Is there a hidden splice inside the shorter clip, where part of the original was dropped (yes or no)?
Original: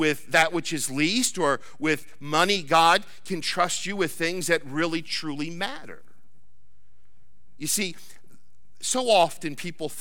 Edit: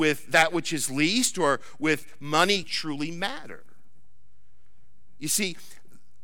yes